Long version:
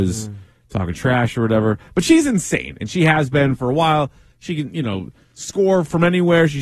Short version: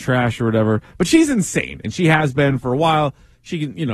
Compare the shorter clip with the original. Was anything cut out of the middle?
no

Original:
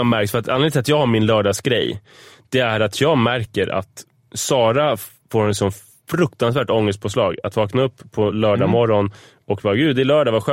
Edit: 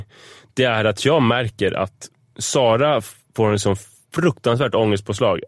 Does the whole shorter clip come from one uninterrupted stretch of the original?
yes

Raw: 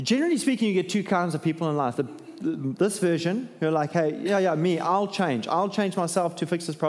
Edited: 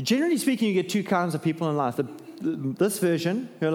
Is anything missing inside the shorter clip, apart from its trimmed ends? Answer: no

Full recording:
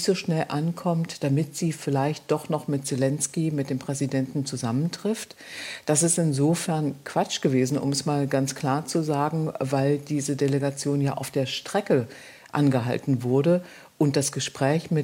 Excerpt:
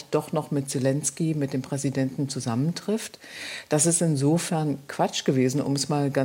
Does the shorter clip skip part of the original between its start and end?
no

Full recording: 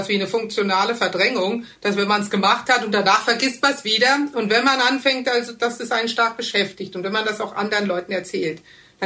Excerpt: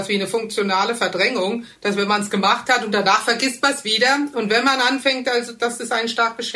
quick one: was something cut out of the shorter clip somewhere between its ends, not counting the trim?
no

